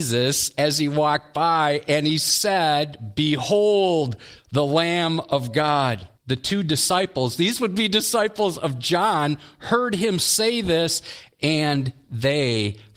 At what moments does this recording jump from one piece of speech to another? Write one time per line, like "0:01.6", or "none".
0:06.2